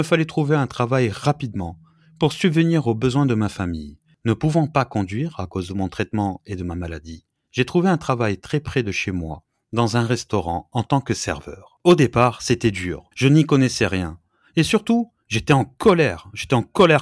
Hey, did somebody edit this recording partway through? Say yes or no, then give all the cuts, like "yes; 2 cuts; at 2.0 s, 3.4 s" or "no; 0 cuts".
yes; 1 cut; at 13.1 s